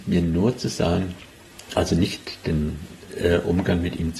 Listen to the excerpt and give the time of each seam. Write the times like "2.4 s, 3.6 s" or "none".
none

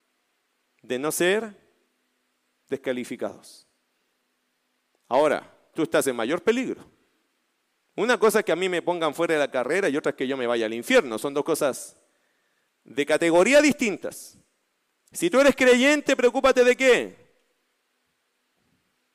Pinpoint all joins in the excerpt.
5.7 s

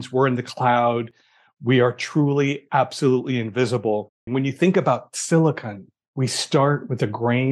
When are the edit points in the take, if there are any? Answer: 4.3 s

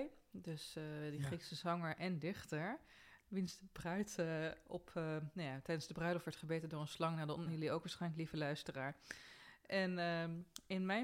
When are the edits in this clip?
7.5 s

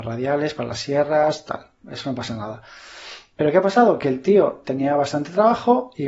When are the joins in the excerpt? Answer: none

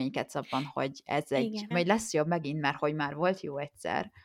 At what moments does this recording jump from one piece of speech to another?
1.7 s

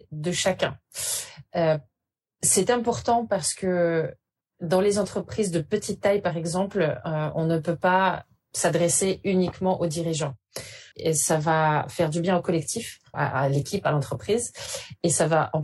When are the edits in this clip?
10.9 s, 13.1 s

